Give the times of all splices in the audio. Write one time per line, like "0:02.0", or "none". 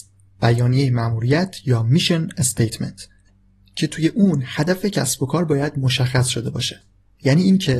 none